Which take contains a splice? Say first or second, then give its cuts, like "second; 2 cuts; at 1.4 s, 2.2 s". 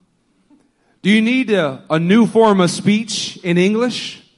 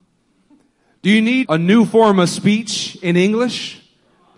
second; 1 cut; at 1.4 s